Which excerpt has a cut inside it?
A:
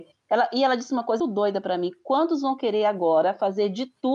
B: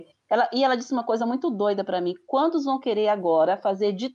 A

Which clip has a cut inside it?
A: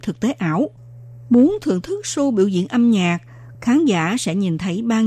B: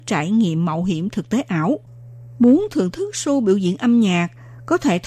A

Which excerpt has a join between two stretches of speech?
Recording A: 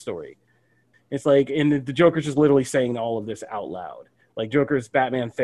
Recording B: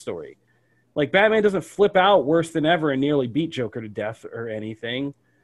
A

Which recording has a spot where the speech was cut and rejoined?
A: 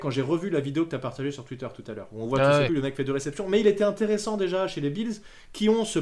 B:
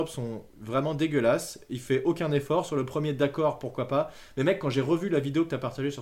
A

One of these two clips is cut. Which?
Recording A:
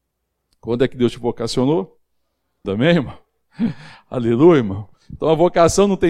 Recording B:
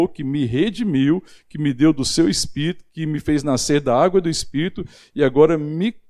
A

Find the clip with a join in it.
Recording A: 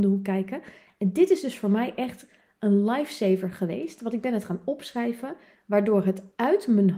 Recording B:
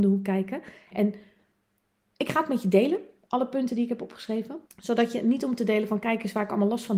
B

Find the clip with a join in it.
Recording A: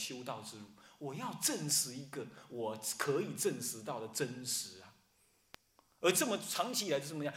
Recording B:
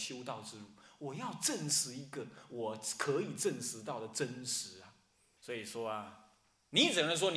B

